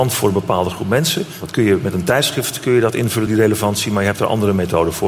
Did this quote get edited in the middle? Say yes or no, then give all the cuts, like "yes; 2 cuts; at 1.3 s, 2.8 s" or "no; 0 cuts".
no; 0 cuts